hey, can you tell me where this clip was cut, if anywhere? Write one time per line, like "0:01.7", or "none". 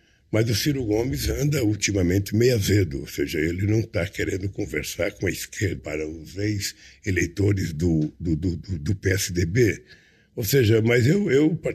0:05.8